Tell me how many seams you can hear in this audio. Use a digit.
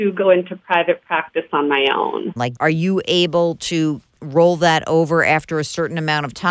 1